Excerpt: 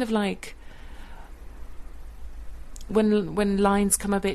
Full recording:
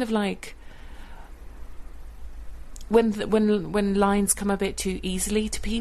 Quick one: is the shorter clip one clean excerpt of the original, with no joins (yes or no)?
no